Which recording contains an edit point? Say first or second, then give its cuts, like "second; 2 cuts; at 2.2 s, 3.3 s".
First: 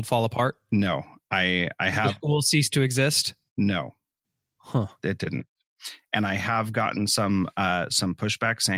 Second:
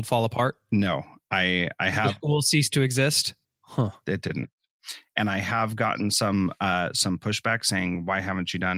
second; 1 cut; at 3.4 s